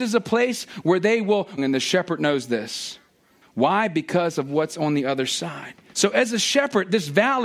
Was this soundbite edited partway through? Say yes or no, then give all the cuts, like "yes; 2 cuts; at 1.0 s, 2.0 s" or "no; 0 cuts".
yes; 3 cuts; at 1.6 s, 3.4 s, 5.9 s